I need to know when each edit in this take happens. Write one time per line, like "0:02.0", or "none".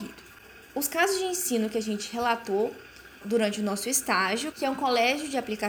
0:03.2
0:04.5